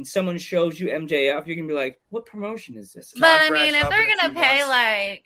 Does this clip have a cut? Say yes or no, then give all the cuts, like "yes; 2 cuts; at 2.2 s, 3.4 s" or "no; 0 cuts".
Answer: yes; 2 cuts; at 2.0 s, 3.1 s